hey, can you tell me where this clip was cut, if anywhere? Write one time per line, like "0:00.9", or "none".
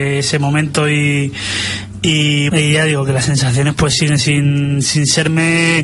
0:02.5